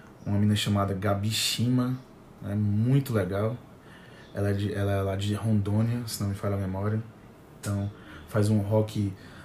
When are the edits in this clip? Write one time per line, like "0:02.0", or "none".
none